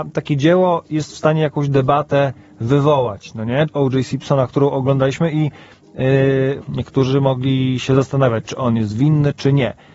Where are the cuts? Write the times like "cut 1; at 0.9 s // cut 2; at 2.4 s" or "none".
cut 1; at 3.7 s // cut 2; at 6.6 s

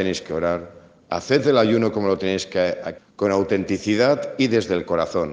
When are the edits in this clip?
cut 1; at 3.0 s

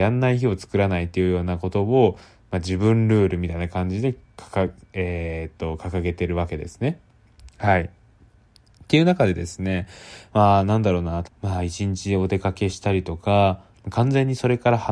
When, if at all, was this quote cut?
cut 1; at 11.2 s // cut 2; at 13.7 s

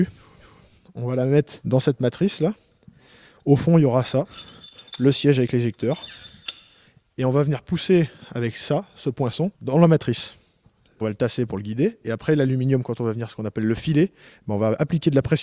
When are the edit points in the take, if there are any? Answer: none

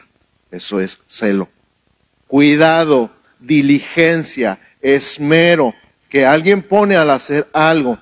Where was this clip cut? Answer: cut 1; at 2.3 s

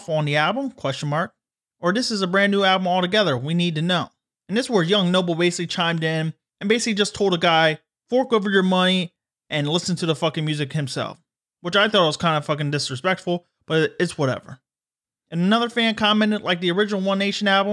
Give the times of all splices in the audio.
none

